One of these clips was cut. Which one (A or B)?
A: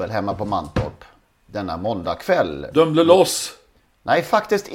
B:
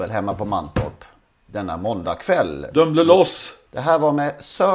B